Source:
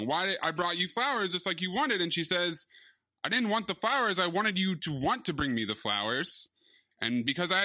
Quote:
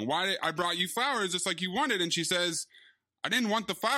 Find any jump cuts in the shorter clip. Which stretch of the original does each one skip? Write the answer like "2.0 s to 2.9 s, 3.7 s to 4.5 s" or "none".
none

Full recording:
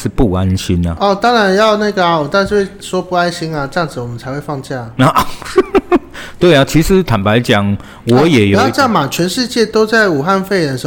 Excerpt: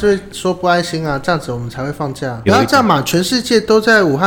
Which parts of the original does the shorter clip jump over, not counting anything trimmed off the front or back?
4.9 s to 8.5 s

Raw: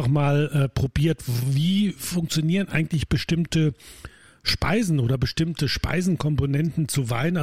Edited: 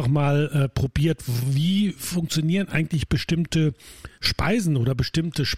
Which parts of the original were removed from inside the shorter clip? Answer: 4.1 s to 4.4 s

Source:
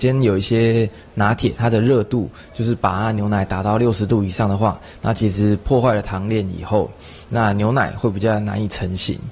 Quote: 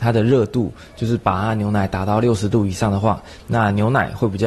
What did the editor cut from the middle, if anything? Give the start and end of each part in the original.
5.0 s to 7.2 s

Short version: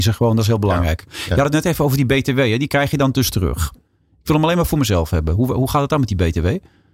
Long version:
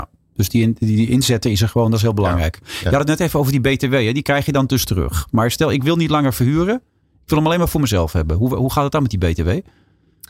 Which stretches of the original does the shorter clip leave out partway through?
5.3 s to 6.8 s

